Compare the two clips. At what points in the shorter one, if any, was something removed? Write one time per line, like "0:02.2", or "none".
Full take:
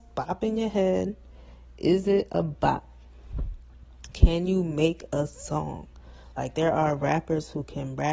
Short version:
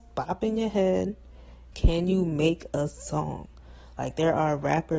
0:01.7